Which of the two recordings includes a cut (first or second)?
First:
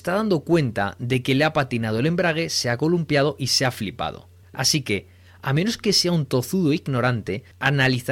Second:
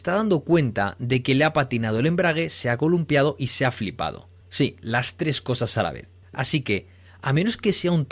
first